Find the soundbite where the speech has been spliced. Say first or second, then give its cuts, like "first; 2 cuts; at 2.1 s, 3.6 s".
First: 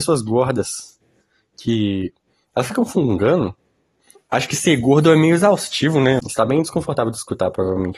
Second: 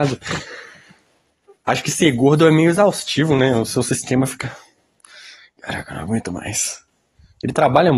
first; 2 cuts; at 4.2 s, 6.2 s